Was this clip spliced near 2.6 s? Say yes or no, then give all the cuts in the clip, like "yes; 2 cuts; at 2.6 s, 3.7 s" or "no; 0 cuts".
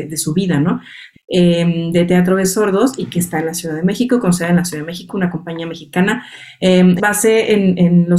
no; 2 cuts; at 1.1 s, 7.0 s